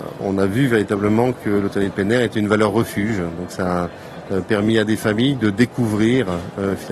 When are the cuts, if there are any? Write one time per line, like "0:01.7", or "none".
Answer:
none

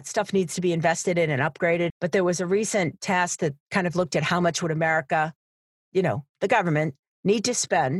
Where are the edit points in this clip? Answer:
0:01.9

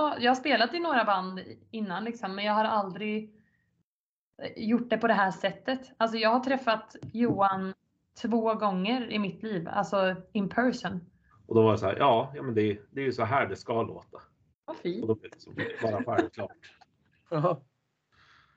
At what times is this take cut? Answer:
0:11.3
0:14.5

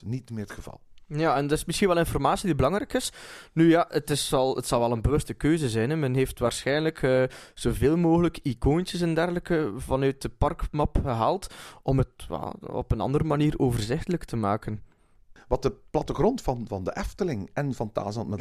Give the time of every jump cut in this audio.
none

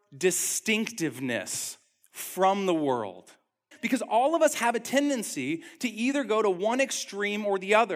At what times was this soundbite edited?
0:03.7

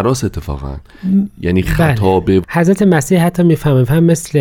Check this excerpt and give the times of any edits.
0:02.4

